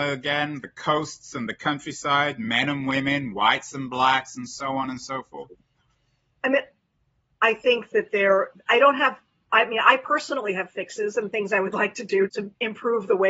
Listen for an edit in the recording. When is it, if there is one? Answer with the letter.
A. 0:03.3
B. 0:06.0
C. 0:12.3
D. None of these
C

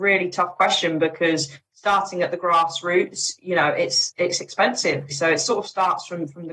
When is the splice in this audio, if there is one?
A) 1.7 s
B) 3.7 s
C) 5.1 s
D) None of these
C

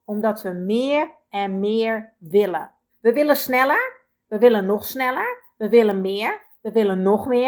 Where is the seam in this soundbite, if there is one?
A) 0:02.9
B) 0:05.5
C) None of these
A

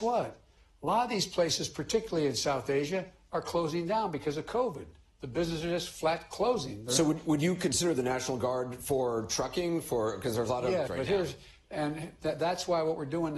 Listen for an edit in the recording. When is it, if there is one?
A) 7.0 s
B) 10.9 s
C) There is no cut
B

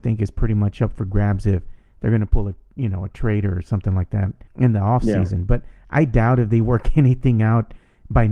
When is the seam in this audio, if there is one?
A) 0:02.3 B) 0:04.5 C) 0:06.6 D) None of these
B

